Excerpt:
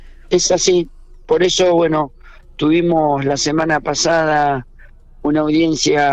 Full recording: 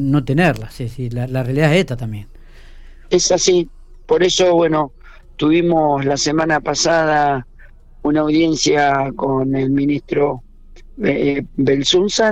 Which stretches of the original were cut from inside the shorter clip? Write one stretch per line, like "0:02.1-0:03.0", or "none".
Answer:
none